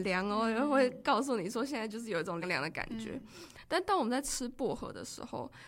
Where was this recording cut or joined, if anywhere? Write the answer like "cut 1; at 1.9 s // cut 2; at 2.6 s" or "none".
cut 1; at 2.4 s